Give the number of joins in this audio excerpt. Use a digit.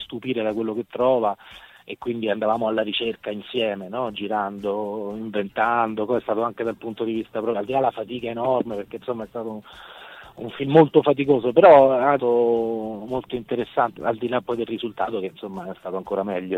2